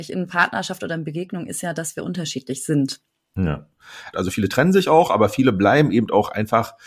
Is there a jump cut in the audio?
yes; 1 cut; at 4.1 s

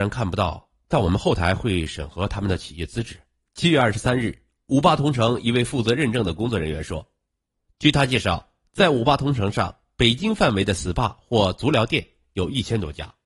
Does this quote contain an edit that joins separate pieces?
yes; 1 cut; at 3.4 s

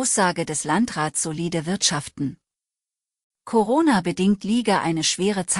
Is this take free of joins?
yes; 0 cuts

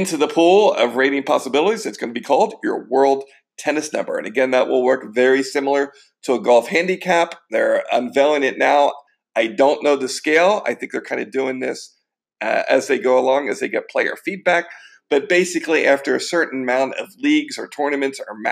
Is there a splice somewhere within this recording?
no; 0 cuts

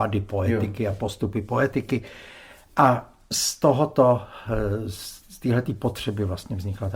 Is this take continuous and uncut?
yes; 0 cuts

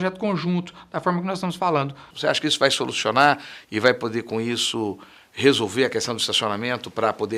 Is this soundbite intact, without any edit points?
no; 1 cut; at 2.1 s

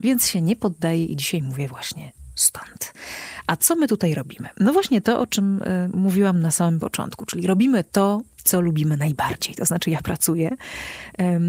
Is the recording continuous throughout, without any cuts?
yes; 0 cuts

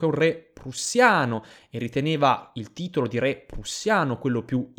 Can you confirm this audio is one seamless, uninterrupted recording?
yes; 0 cuts

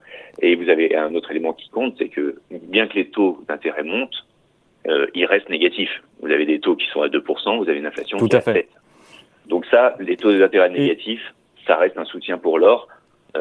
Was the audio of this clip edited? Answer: no; 0 cuts

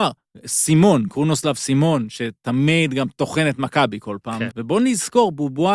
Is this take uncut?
no; 1 cut; at 4.5 s

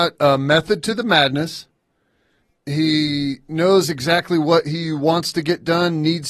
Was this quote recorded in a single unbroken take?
yes; 0 cuts

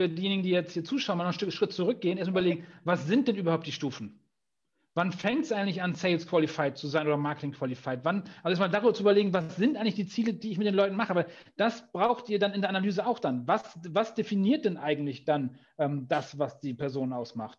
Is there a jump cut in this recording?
no; 0 cuts

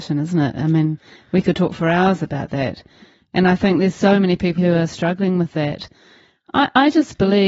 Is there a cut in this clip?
yes; 1 cut; at 4.6 s

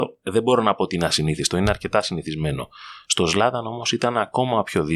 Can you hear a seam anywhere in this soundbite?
no; 0 cuts

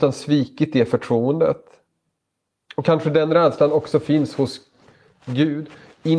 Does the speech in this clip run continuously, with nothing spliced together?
yes; 0 cuts

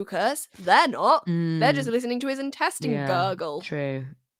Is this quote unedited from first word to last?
yes; 0 cuts

